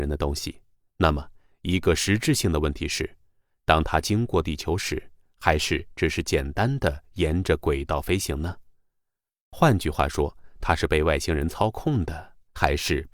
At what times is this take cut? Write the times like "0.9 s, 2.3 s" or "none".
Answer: 5.3 s